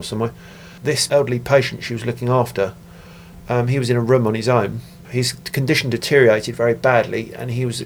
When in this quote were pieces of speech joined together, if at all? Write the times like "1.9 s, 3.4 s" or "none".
none